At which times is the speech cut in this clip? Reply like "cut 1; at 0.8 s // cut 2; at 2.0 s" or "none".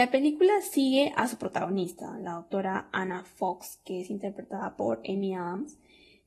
none